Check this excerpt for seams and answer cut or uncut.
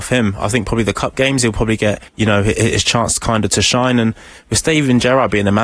cut